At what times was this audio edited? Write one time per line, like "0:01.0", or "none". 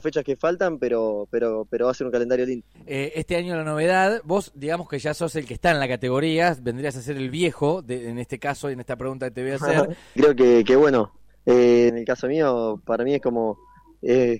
0:02.7
0:10.2
0:11.9